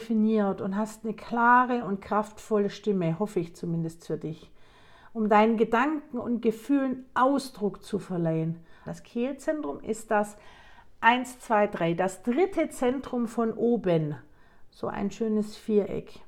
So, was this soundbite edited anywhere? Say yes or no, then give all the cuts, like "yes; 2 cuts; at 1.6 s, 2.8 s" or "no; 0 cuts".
yes; 1 cut; at 8.9 s